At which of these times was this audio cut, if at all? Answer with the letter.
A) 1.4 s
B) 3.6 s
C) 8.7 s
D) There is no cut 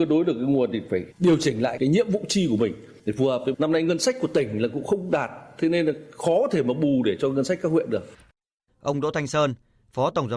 C